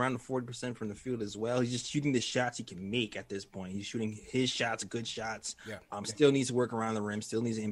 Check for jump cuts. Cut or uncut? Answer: uncut